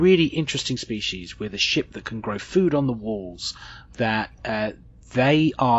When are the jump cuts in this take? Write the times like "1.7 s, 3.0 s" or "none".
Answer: 3.9 s